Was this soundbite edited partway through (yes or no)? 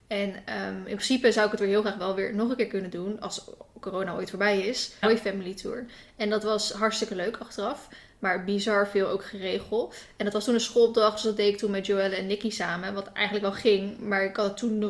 yes